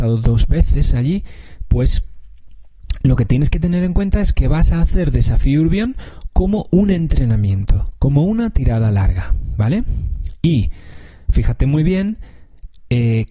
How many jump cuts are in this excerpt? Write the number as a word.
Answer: zero